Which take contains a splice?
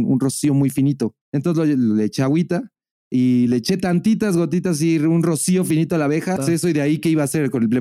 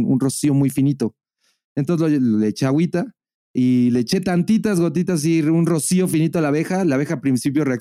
first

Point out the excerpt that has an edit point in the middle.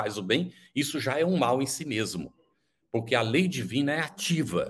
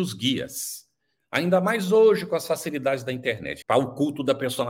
second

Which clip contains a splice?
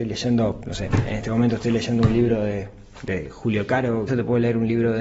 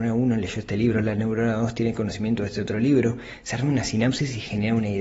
first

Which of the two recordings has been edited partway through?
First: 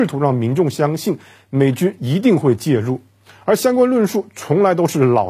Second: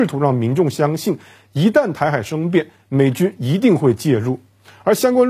first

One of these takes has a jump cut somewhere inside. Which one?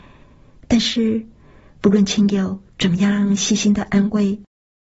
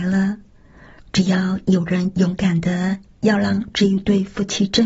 second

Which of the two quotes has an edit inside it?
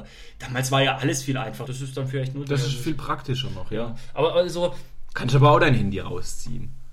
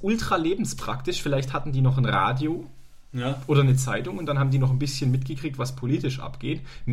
first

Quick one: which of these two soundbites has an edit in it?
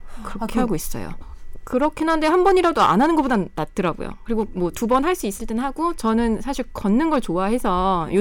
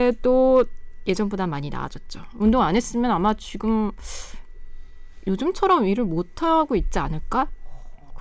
first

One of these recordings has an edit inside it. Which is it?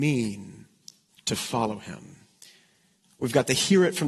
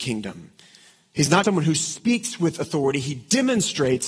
second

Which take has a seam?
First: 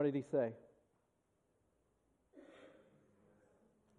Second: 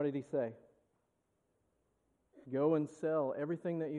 second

